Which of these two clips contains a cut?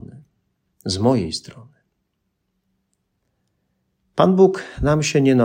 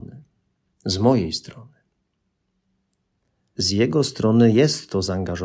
second; 1 cut; at 3.6 s

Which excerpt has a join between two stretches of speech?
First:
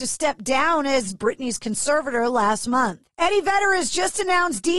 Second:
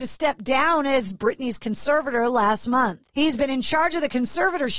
first; 1 cut; at 3.1 s

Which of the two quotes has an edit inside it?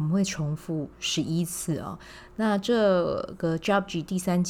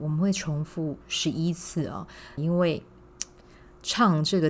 second; 1 cut; at 2.4 s

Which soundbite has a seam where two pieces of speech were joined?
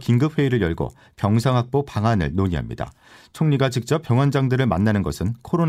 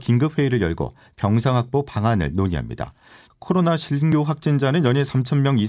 second; 1 cut; at 3.3 s

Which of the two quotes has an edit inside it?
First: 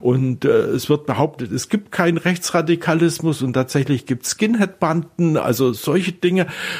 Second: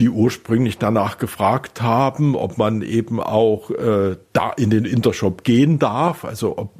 first; 1 cut; at 5.8 s

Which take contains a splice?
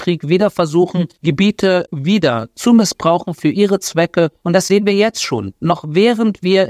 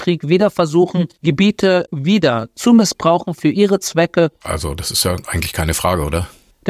second; 1 cut; at 4.4 s

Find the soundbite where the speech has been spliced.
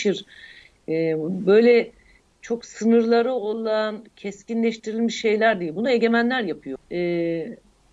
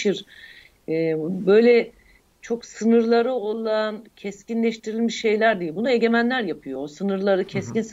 first; 1 cut; at 6.8 s

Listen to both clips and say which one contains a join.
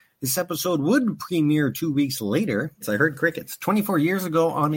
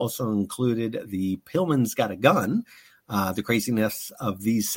first; 1 cut; at 2.8 s

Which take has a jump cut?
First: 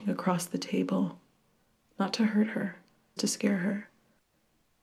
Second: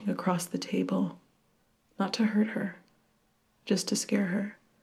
first; 1 cut; at 3.2 s

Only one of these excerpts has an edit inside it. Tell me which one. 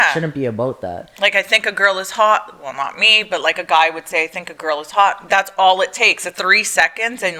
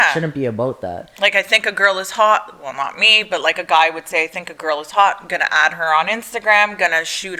first; 2 cuts; at 5.3 s, 6.3 s

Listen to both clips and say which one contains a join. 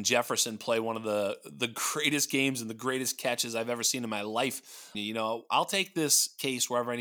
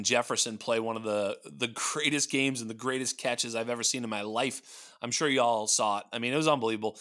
first; 1 cut; at 4.9 s

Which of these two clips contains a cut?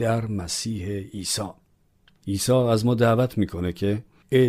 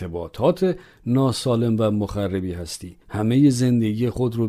second; 1 cut; at 3.0 s

